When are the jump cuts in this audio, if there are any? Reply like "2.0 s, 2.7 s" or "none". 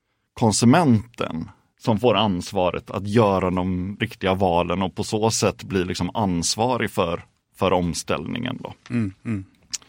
4.0 s